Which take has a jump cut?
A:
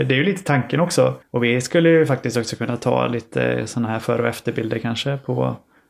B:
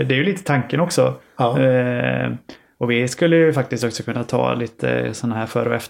A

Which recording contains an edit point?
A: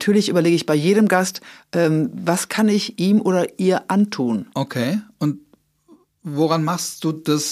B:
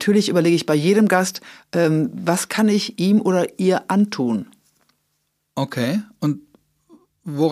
A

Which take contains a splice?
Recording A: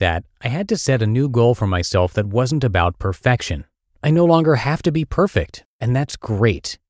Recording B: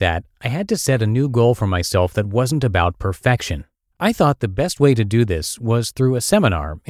B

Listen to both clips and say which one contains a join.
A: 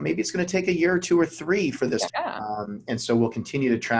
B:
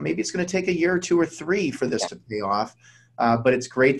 A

